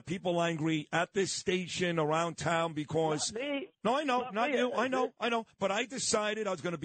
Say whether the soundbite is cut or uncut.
uncut